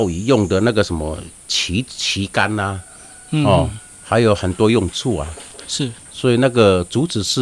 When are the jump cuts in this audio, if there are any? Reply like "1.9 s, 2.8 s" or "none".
none